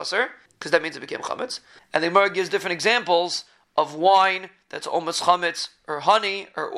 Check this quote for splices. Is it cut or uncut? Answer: cut